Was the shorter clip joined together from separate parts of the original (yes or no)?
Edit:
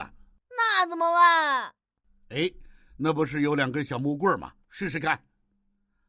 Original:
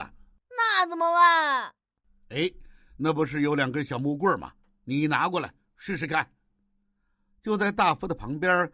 yes